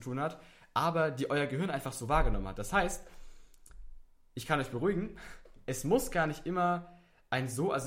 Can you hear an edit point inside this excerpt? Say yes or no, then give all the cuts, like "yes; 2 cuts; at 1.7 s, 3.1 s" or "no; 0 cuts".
no; 0 cuts